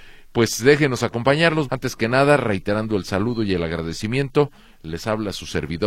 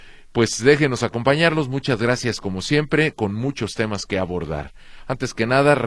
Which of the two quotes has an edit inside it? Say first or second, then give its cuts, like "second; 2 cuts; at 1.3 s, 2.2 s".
first; 1 cut; at 1.7 s